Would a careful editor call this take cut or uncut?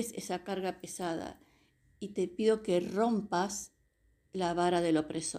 uncut